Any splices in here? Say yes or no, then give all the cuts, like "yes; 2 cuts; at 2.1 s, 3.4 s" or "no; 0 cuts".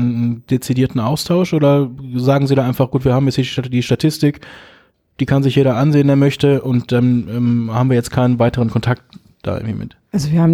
no; 0 cuts